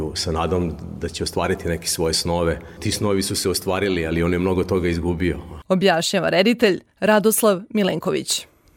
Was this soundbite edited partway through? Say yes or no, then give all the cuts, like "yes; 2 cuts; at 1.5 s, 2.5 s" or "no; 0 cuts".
yes; 1 cut; at 5.6 s